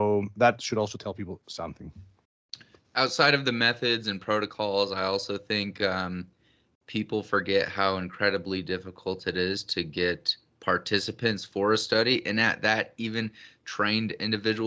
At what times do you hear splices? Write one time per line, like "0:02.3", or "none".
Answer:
none

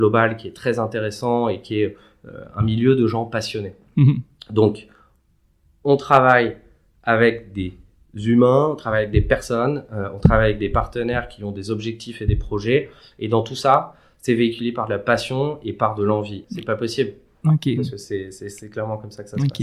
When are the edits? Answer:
0:16.4
0:17.8

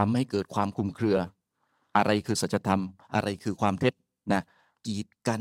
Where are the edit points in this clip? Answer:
none

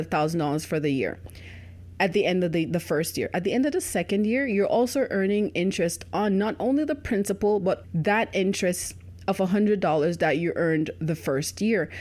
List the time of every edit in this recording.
0:07.8

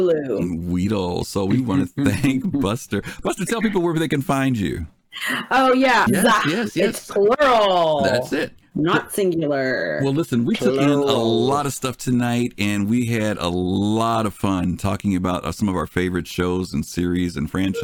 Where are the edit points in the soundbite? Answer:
0:06.1

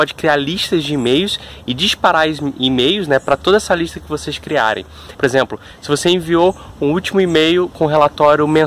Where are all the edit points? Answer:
0:05.1

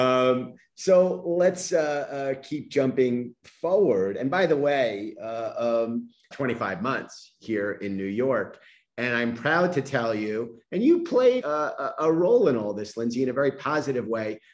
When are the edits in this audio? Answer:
0:06.3
0:11.4

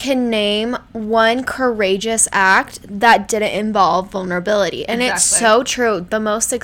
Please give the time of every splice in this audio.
none

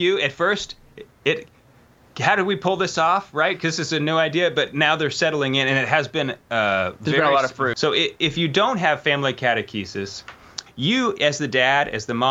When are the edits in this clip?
0:07.7
0:10.7

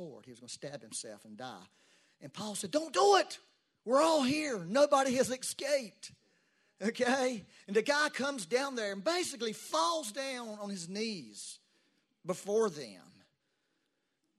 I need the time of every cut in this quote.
none

